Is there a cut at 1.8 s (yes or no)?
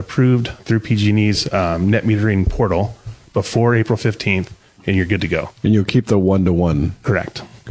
no